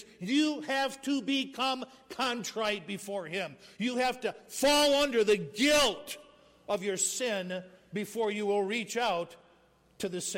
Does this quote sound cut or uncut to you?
uncut